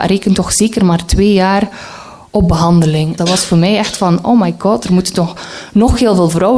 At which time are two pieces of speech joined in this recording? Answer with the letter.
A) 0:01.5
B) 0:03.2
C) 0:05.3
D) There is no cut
B